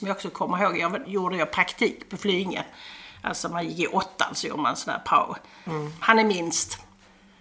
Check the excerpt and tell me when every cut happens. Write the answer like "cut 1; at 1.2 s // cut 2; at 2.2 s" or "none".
cut 1; at 1.0 s // cut 2; at 5.7 s